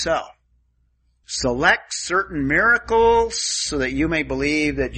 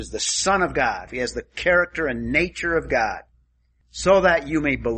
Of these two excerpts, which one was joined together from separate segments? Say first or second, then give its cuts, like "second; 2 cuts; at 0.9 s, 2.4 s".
second; 1 cut; at 1.1 s